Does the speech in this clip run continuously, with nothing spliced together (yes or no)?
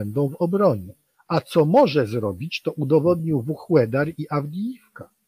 yes